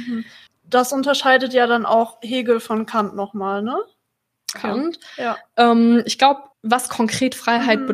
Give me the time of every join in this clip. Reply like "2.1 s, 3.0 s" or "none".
4.5 s, 6.5 s